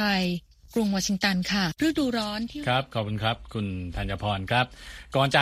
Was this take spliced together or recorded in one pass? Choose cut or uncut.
cut